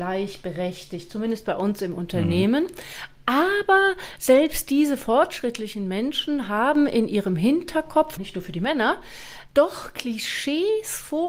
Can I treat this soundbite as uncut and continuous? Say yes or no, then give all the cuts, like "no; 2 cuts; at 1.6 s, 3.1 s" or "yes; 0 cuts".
no; 1 cut; at 8.2 s